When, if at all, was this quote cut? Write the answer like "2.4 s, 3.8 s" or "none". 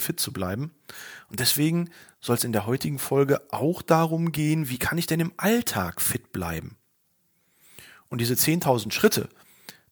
none